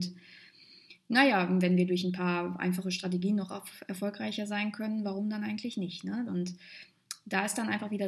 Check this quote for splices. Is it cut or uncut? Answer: cut